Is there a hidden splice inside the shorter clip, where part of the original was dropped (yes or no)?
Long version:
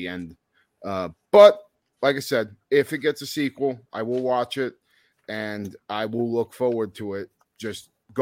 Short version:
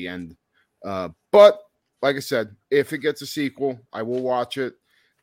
no